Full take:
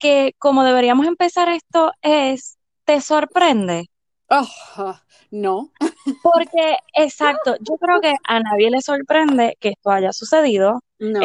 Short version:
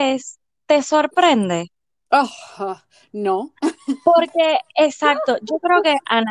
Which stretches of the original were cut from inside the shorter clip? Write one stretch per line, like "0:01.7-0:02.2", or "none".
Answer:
none

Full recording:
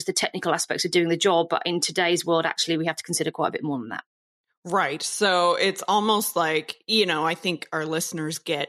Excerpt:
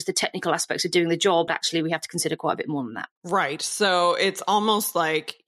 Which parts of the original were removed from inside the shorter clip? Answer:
0:01.5-0:02.4
0:04.1-0:04.6

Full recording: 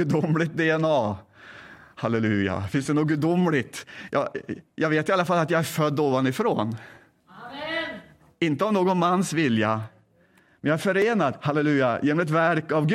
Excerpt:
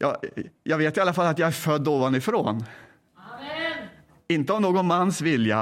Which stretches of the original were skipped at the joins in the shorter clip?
none

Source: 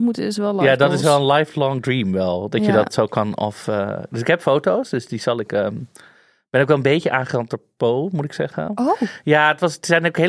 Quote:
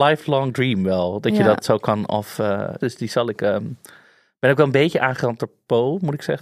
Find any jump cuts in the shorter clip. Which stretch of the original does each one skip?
0:04.1-0:04.9

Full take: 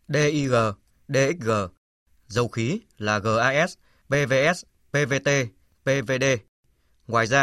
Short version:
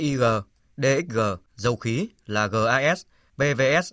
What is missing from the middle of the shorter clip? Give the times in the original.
0:01.8-0:02.2

